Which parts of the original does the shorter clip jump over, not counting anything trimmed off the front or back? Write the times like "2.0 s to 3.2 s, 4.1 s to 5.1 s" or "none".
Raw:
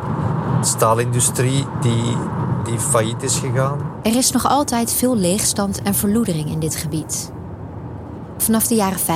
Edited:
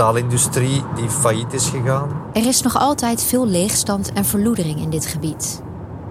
1.8 s to 2.7 s